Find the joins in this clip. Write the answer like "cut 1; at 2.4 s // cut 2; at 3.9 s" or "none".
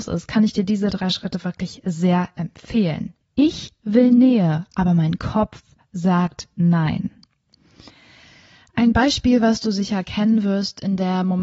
cut 1; at 3.2 s